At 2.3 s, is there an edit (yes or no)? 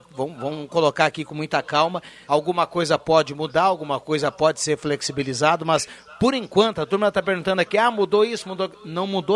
yes